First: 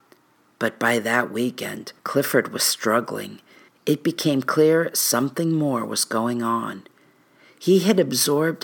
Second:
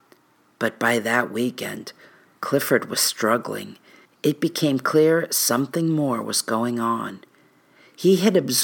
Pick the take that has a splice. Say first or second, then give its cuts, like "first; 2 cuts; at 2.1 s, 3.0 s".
first; 1 cut; at 2.0 s